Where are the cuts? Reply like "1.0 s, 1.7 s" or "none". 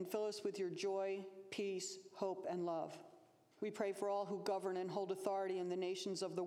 3.5 s